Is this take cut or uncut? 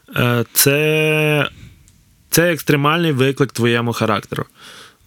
cut